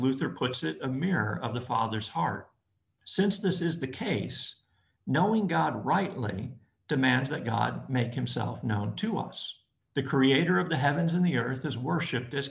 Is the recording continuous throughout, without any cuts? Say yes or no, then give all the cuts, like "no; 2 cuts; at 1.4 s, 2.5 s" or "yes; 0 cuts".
no; 2 cuts; at 3.0 s, 9.8 s